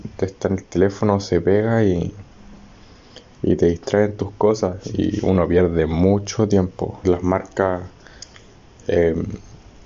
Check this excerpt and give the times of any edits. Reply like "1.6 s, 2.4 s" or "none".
7.0 s